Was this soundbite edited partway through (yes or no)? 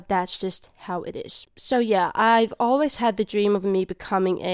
no